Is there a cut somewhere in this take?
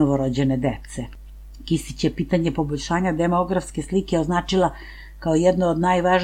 no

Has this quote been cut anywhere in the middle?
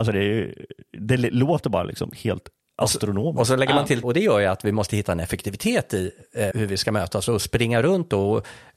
yes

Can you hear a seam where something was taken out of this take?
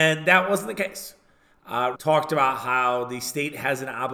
yes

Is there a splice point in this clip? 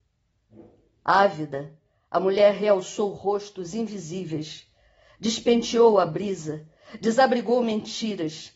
no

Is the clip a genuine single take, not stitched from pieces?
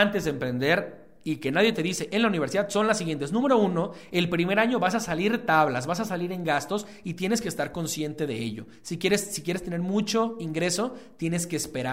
yes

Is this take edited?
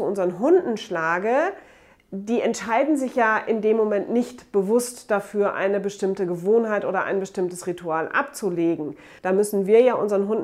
yes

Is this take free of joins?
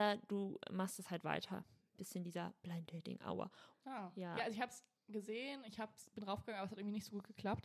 no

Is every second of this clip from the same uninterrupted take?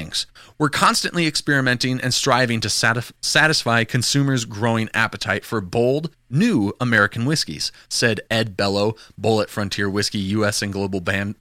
yes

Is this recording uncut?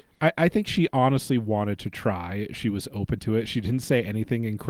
yes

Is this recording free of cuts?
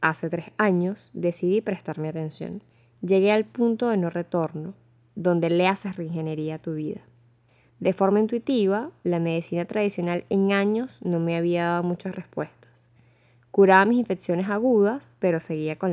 yes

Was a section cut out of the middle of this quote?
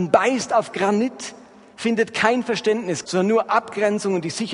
yes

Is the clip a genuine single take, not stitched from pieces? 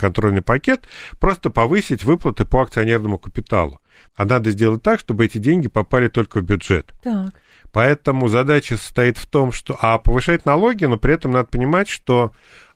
no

